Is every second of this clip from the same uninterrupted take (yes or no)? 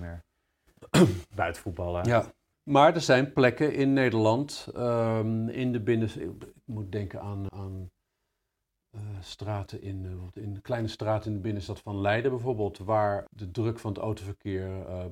no